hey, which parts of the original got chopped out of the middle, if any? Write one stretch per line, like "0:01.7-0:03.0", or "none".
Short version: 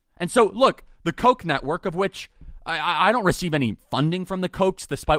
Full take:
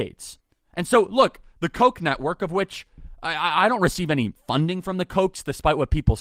none